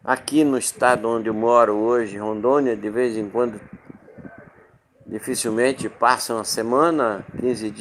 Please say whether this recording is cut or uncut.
uncut